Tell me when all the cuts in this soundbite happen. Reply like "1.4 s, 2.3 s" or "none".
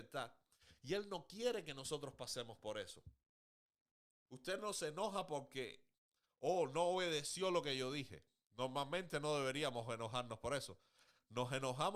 4.3 s